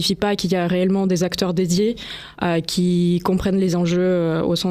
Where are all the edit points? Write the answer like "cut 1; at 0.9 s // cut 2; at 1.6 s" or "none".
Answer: none

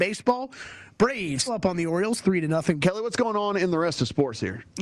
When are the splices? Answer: cut 1; at 1.5 s // cut 2; at 2.8 s

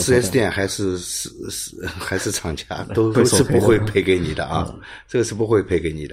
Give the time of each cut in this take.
cut 1; at 3.1 s

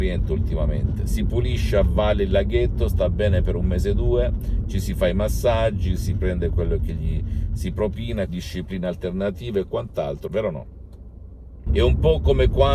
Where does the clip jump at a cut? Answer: cut 1; at 8.3 s // cut 2; at 10.3 s // cut 3; at 11.7 s

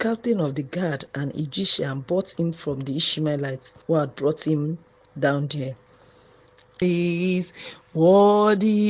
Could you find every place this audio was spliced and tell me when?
cut 1; at 3.8 s // cut 2; at 6.8 s

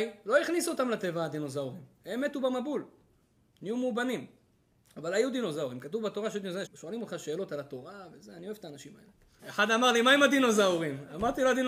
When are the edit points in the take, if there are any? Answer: cut 1; at 6.7 s // cut 2; at 9.4 s

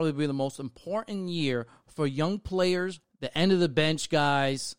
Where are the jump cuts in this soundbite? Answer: cut 1; at 3.0 s

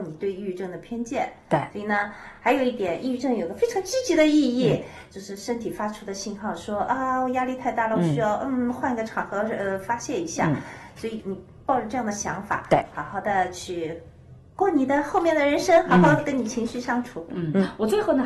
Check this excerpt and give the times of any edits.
none

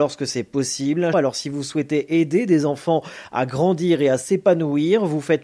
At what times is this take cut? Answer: cut 1; at 1.1 s

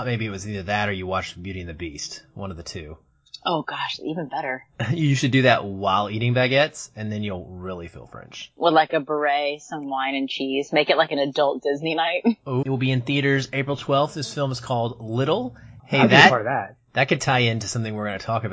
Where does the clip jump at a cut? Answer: cut 1; at 12.6 s // cut 2; at 15.8 s

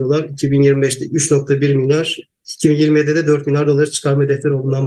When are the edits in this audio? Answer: none

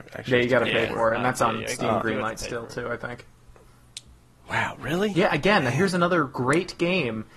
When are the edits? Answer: none

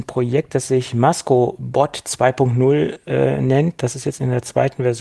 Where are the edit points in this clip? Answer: none

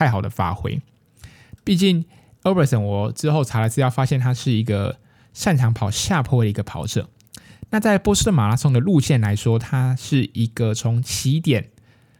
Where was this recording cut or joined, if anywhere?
cut 1; at 1.6 s

